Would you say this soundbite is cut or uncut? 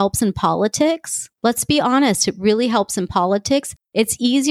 uncut